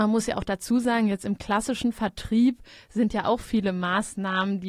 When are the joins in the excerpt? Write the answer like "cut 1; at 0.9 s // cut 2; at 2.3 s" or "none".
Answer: none